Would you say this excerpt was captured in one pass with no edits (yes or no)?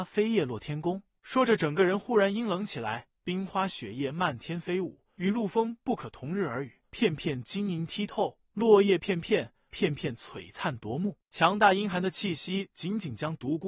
no